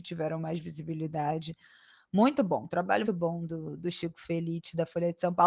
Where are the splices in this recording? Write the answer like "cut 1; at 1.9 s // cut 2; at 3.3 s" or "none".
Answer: cut 1; at 3.0 s

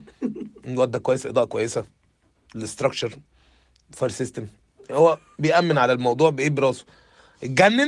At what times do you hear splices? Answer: none

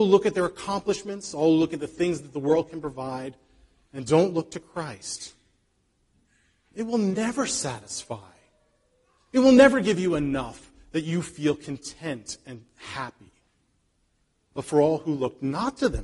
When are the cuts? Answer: none

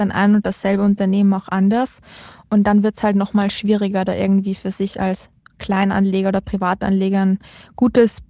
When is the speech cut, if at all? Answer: none

